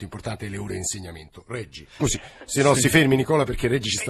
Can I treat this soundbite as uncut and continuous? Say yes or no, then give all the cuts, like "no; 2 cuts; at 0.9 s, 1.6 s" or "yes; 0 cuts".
no; 1 cut; at 2.0 s